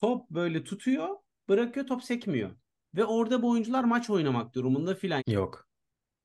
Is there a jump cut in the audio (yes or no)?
yes